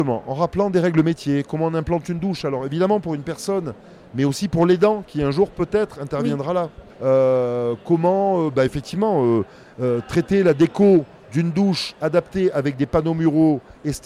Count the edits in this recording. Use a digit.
1